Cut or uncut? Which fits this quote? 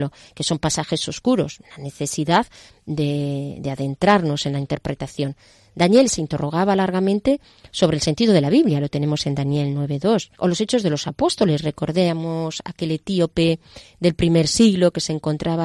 cut